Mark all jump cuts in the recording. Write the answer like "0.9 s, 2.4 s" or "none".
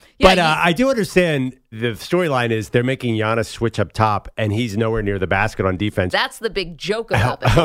1.7 s, 6.1 s